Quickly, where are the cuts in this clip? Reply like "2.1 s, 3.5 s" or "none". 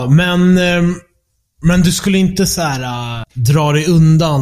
3.2 s